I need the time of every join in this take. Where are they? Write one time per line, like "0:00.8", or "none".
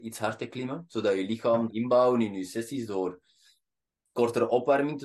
0:01.7